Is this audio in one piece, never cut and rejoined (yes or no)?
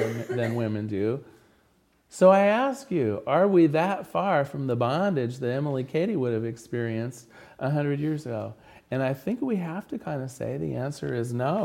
yes